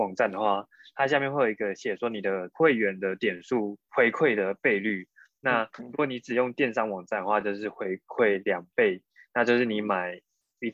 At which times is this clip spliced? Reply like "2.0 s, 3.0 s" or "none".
none

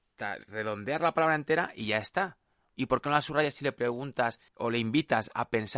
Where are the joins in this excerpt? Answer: 2.7 s, 4.5 s

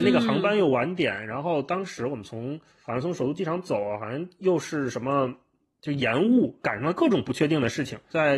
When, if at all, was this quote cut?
none

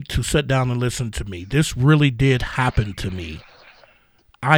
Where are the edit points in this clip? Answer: none

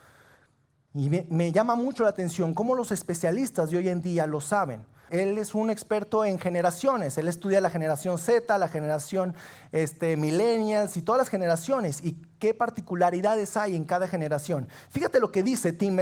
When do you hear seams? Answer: 5.1 s

